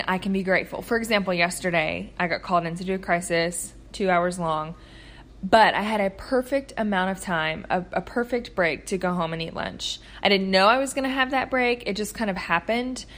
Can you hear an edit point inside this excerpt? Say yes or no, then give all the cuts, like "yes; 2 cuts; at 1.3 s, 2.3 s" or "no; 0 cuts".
no; 0 cuts